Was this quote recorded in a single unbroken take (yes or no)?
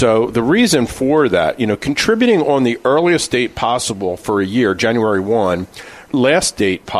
no